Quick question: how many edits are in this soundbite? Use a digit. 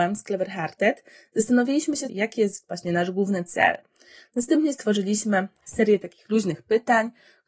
1